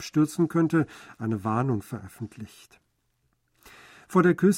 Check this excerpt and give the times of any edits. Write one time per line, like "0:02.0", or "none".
none